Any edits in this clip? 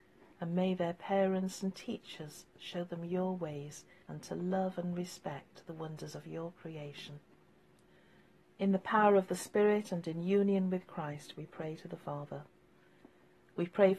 yes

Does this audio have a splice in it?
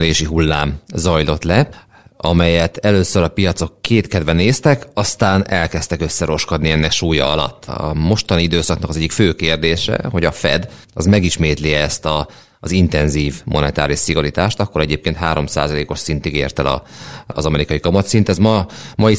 no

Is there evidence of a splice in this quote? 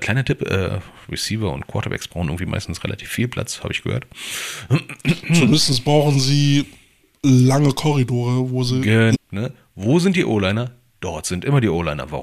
yes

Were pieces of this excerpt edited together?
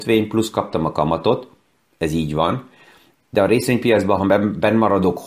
no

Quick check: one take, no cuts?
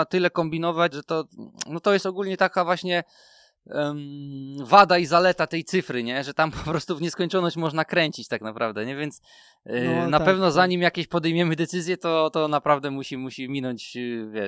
no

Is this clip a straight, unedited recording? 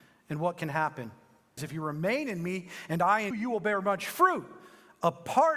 no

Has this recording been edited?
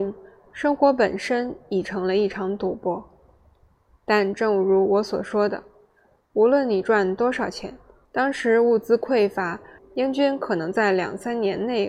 yes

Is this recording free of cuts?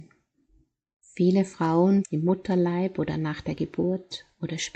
no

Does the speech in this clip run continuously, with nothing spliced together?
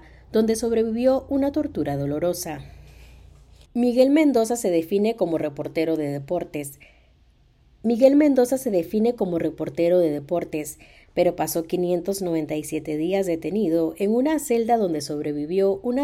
no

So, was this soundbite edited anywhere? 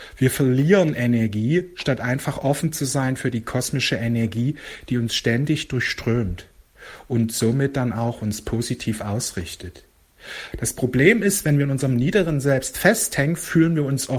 yes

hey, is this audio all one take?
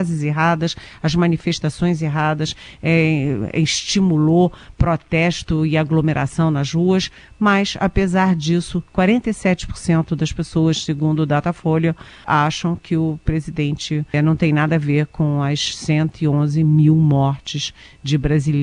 no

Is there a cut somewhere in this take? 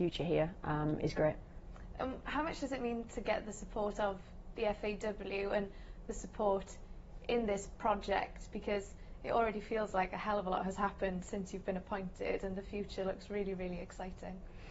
no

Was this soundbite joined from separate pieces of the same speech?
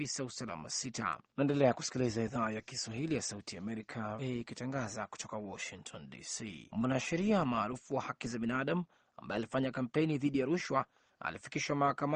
yes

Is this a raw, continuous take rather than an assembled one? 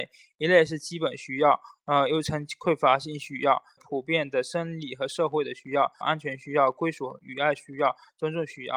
no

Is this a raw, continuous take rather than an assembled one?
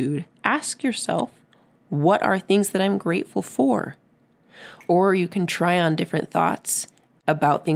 no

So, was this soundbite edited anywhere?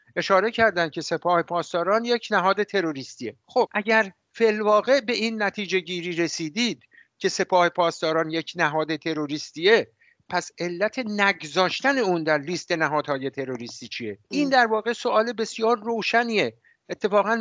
yes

